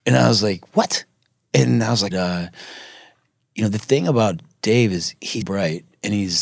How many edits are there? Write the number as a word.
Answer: two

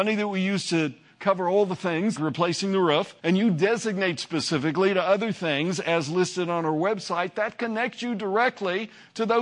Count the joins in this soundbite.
two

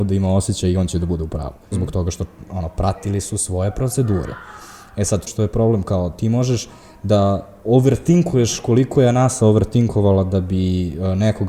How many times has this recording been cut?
two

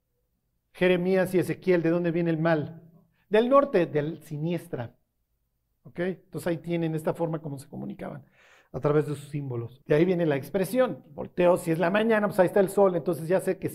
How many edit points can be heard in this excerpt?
one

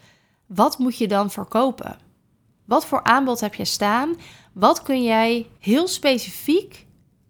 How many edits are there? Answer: one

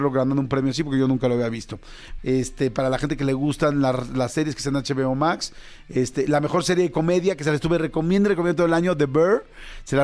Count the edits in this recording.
one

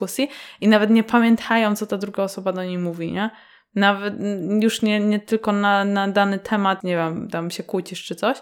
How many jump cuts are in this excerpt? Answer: one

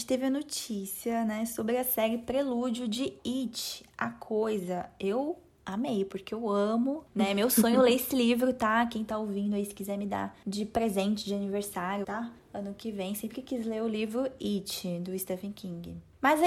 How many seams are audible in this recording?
one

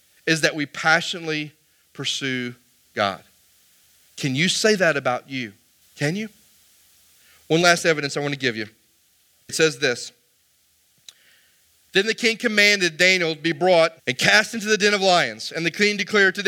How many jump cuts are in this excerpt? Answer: three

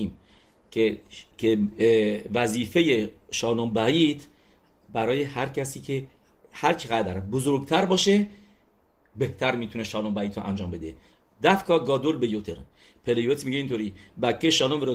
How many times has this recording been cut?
one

